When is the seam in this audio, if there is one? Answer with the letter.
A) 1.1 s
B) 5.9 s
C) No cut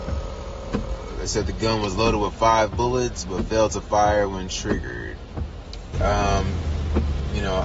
B